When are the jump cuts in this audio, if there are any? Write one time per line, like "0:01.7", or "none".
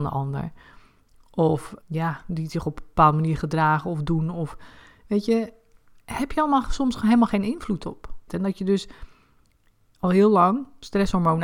0:01.8
0:08.3